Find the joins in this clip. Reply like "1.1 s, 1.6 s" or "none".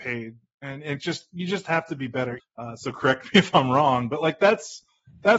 2.4 s